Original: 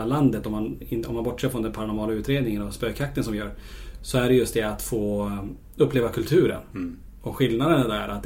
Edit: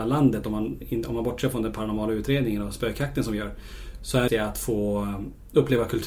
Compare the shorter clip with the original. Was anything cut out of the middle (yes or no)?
yes